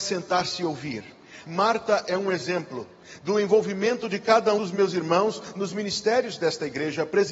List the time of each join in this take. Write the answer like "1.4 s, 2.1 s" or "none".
1.4 s, 4.6 s